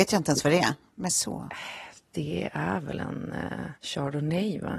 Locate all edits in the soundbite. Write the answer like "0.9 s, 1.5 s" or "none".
3.7 s

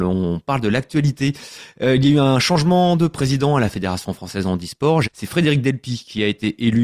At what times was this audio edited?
5.0 s

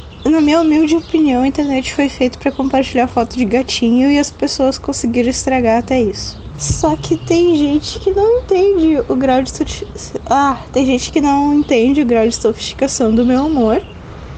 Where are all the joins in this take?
none

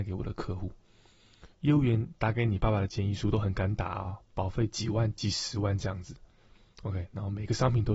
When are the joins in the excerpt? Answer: 1.5 s

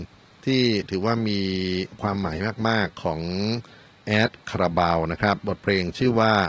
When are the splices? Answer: none

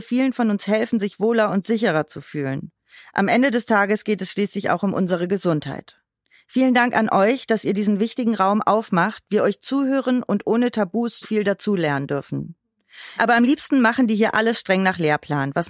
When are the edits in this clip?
11.2 s, 13.2 s

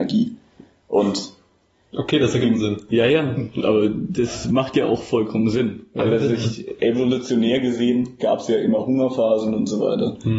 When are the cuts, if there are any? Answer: 2.9 s

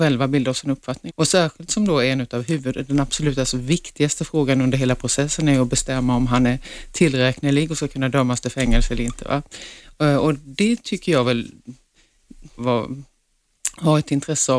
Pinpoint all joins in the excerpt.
1.1 s, 12.6 s

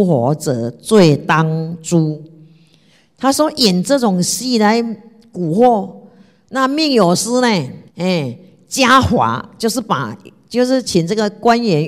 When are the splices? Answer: 6.4 s, 7.9 s, 10.8 s

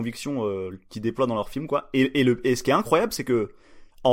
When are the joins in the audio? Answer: none

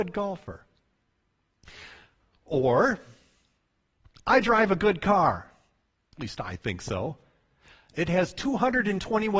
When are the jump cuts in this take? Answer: 7.9 s

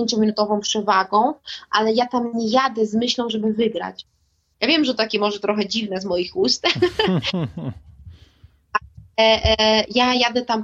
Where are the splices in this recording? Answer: none

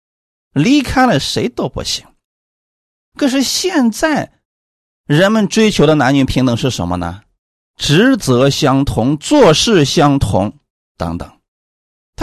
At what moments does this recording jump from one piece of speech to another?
3.0 s, 10.8 s

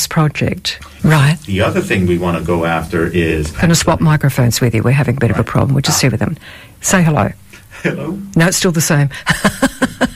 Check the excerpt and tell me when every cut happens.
1.0 s, 3.6 s

